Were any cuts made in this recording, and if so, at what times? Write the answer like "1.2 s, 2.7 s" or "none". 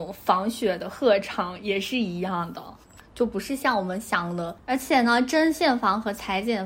3.0 s, 4.6 s